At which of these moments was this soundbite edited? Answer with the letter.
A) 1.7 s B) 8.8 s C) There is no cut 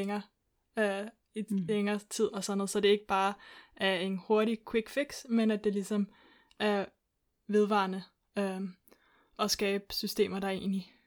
C